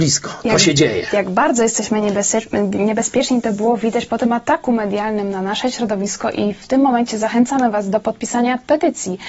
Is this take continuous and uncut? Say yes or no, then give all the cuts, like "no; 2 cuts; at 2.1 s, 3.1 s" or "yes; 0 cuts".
yes; 0 cuts